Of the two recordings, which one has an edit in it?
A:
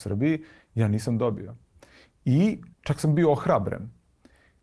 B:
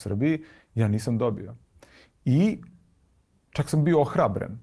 A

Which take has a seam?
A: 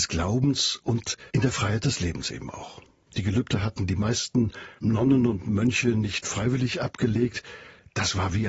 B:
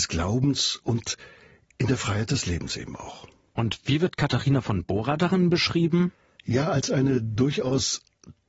A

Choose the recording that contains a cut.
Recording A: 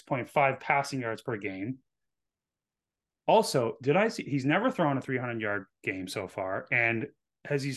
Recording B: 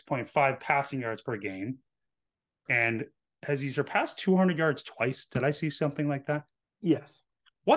B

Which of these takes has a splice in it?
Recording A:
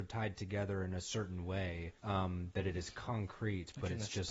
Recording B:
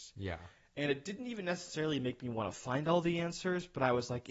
A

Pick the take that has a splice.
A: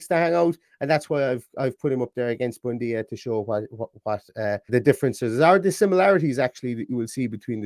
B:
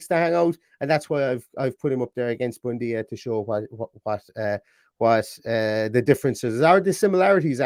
A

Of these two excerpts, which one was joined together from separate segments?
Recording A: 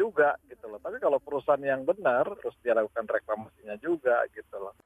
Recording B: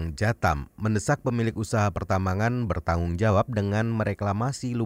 A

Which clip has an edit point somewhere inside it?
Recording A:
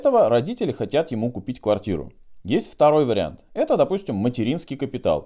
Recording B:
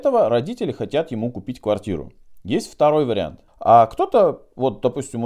B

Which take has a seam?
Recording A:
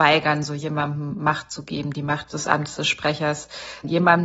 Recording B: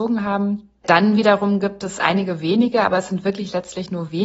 A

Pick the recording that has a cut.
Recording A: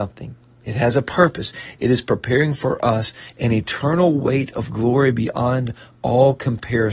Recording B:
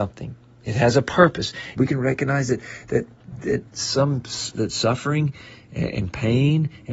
B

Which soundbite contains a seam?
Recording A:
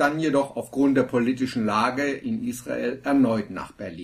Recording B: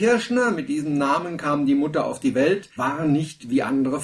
B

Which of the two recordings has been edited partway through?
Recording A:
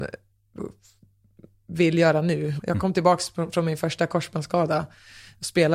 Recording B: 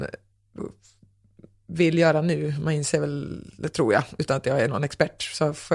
A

